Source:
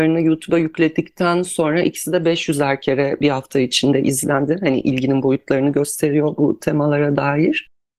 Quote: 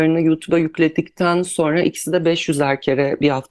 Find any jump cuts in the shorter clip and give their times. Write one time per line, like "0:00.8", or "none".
none